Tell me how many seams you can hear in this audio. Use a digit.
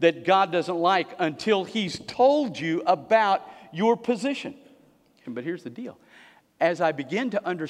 1